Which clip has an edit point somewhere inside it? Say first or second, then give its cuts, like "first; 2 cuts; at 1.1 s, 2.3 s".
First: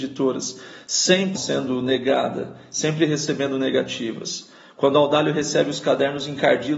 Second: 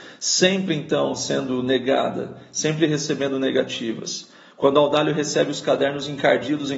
first; 1 cut; at 1.3 s